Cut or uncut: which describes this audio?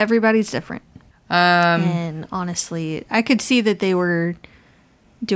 cut